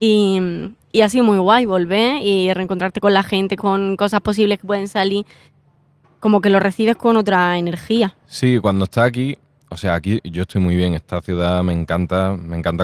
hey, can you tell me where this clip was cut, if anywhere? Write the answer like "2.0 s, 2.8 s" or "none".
3.6 s